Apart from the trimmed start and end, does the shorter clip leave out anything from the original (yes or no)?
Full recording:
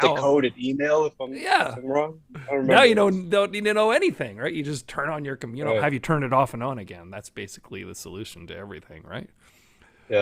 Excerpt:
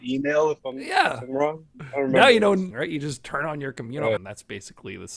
yes